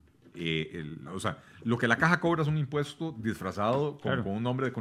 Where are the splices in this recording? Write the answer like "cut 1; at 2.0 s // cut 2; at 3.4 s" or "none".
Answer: cut 1; at 1.1 s